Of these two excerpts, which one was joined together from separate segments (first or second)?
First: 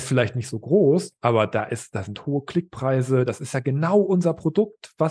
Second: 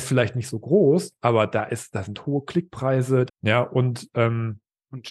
second